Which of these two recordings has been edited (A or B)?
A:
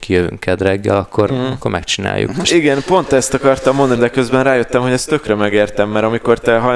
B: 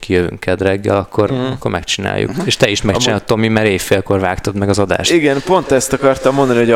A